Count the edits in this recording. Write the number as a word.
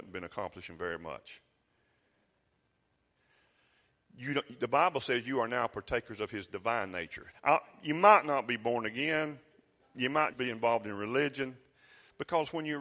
two